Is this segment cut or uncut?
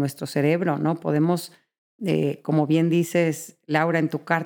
uncut